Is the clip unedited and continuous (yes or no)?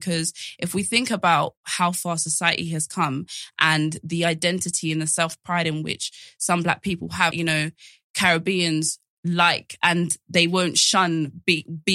no